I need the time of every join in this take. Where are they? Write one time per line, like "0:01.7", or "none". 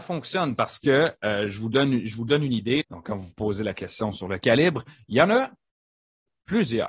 0:02.8